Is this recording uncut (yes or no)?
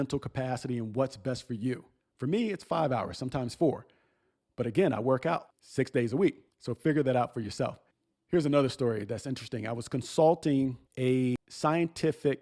yes